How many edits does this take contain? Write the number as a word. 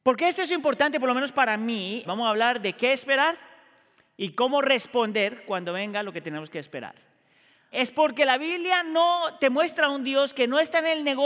two